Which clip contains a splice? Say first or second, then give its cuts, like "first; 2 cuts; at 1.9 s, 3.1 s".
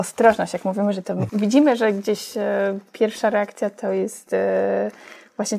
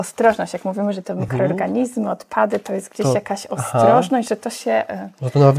first; 1 cut; at 1.3 s